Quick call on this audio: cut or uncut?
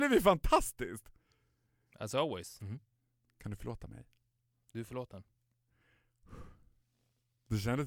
cut